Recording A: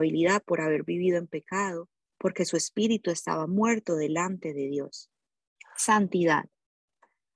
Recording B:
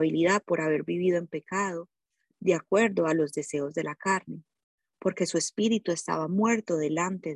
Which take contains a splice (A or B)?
A